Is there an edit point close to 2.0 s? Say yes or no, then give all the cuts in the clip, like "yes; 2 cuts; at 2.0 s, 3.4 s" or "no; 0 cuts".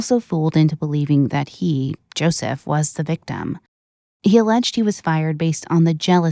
no; 1 cut; at 4.0 s